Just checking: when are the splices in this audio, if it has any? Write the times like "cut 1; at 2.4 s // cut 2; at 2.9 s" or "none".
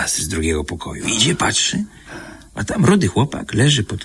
none